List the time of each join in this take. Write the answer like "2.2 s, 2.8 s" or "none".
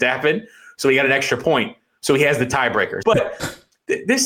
3.0 s